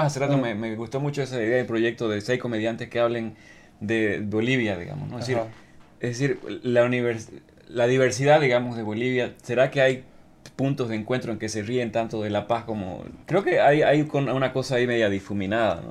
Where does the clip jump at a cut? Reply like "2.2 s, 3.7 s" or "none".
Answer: 13.2 s